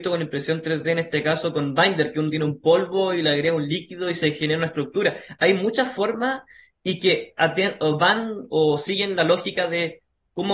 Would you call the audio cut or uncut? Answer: uncut